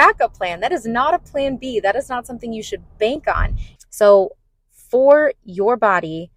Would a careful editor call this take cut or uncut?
cut